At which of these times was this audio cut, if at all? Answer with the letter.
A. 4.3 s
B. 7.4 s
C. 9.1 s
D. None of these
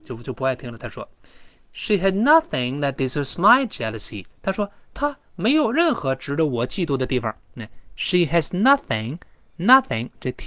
A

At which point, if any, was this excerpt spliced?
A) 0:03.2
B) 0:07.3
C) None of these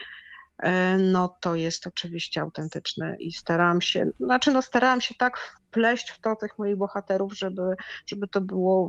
A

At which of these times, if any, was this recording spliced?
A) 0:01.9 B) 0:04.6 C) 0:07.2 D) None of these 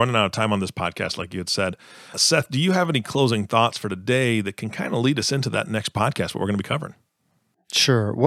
D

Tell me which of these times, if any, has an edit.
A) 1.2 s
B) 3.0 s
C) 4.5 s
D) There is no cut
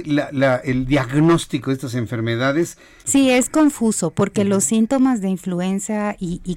B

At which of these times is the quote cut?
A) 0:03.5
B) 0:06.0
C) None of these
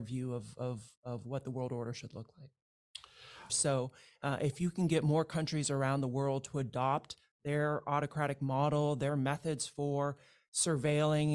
A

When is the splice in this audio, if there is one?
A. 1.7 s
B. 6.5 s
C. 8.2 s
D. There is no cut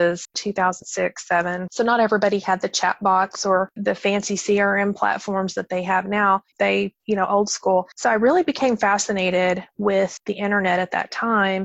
B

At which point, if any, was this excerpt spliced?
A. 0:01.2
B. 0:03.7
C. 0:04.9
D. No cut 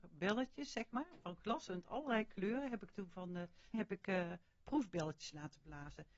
B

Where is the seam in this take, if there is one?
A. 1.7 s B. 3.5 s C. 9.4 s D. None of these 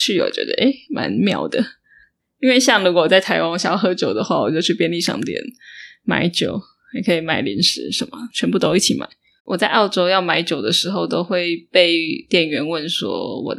C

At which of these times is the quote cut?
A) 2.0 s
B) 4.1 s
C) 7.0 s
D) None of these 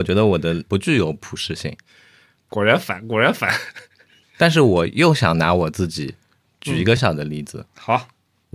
C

